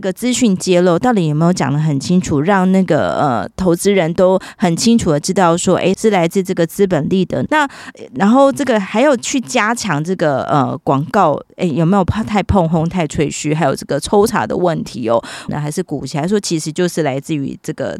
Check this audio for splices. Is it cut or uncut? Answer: cut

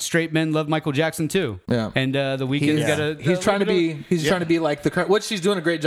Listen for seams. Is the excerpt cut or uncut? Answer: uncut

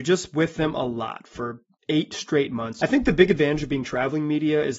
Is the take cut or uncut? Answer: cut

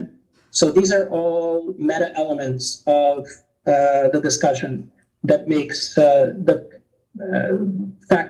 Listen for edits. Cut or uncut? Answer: uncut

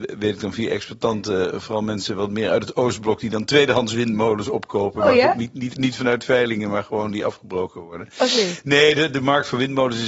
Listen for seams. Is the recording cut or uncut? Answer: uncut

